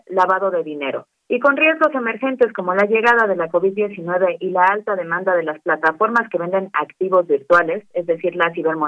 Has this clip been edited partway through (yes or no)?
yes